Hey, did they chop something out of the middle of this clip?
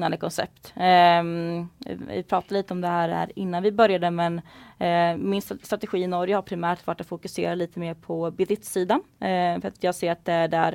no; 0 cuts

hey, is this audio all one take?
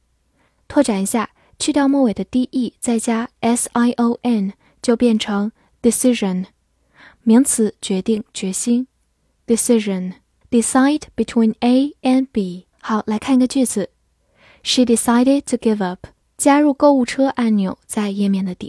no; 3 cuts; at 10.4 s, 12.7 s, 16.2 s

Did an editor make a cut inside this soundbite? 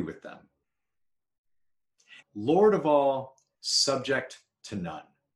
yes; 1 cut; at 2.2 s

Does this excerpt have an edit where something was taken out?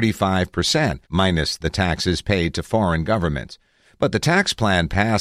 yes; 1 cut; at 1.0 s

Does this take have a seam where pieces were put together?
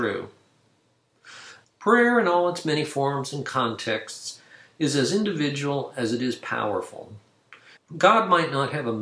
yes; 2 cuts; at 1.6 s, 7.8 s

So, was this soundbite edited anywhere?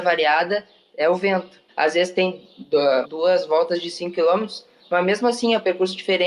yes; 2 cuts; at 1.7 s, 3.0 s

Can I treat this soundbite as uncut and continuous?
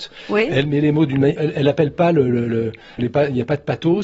no; 2 cuts; at 1.3 s, 3.0 s

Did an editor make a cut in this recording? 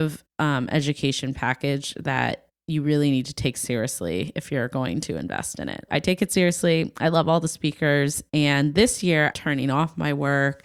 yes; 2 cuts; at 5.9 s, 9.3 s

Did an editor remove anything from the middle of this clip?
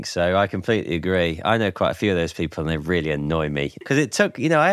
yes; 1 cut; at 3.8 s

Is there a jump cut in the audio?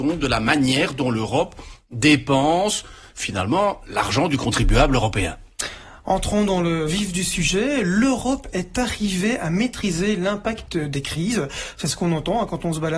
no; 0 cuts

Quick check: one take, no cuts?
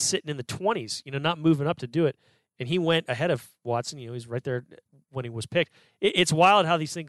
yes; 0 cuts

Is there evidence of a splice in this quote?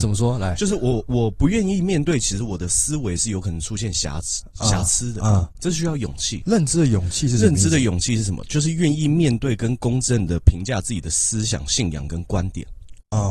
yes; 1 cut; at 6.4 s

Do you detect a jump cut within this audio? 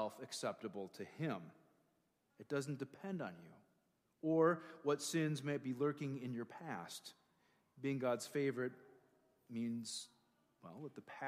yes; 1 cut; at 2.3 s

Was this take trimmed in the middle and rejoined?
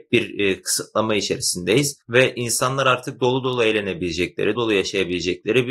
yes; 1 cut; at 4.6 s

